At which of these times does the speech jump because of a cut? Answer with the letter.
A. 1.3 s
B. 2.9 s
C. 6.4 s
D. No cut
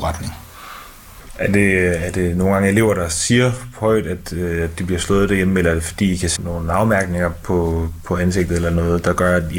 C